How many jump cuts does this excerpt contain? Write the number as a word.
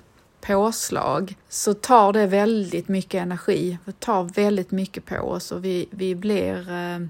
one